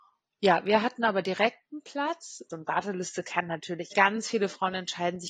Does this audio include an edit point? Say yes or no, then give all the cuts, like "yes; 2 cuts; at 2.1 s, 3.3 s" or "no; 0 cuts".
yes; 2 cuts; at 2.5 s, 3.9 s